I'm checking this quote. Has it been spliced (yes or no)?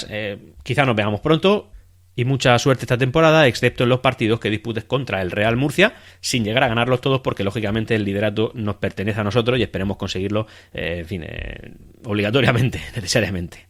no